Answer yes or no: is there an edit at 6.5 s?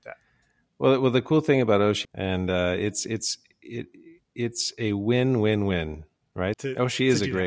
yes